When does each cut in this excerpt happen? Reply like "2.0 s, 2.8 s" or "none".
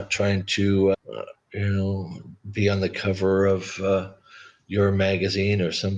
0.9 s, 2.4 s